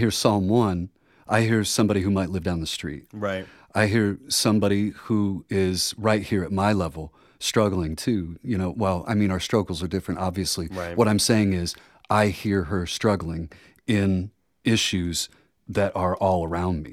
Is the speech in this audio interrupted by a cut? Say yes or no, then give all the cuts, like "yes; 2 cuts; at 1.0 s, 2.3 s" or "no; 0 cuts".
no; 0 cuts